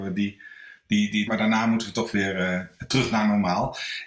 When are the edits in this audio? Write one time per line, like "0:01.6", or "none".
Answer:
0:01.3